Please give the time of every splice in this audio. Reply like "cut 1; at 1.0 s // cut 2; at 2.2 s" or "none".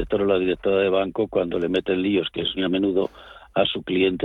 cut 1; at 2.6 s